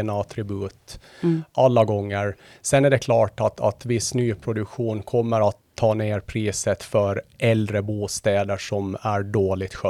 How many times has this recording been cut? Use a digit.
0